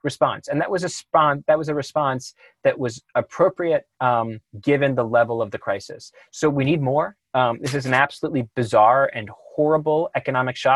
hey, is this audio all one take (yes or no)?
no